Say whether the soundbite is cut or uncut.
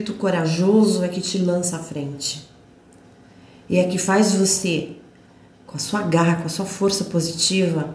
uncut